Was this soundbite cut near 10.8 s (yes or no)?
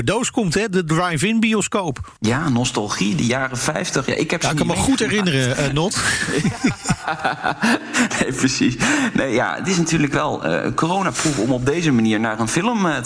no